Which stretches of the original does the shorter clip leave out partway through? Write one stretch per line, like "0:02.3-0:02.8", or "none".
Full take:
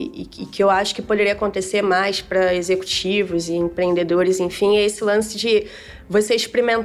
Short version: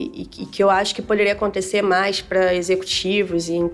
none